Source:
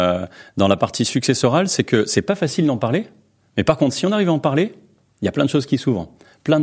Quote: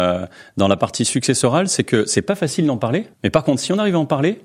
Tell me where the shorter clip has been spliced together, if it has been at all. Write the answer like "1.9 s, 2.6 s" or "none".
3.1 s